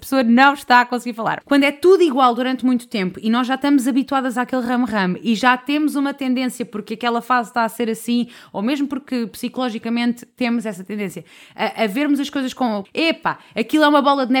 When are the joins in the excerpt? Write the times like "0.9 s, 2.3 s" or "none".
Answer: 1.4 s, 12.8 s